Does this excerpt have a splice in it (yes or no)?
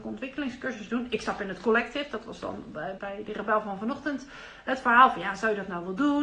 yes